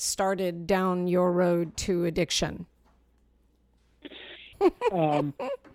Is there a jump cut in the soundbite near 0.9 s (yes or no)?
no